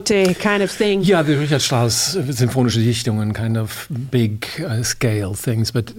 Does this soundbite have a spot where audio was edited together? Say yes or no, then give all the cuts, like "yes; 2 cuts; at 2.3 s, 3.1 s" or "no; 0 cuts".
no; 0 cuts